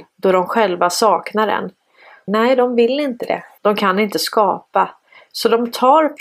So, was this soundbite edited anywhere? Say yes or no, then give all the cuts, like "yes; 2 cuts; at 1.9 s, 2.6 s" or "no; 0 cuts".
yes; 2 cuts; at 2.3 s, 3.6 s